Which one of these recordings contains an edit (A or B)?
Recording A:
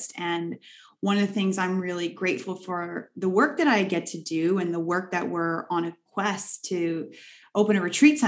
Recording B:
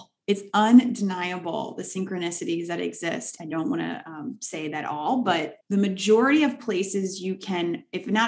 B